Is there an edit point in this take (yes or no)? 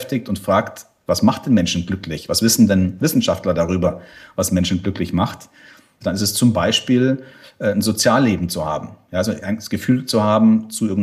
yes